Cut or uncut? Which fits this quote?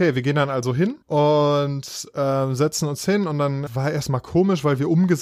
cut